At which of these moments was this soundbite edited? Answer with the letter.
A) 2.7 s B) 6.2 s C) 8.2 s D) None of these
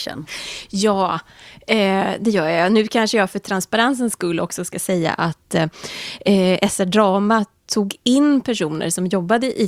D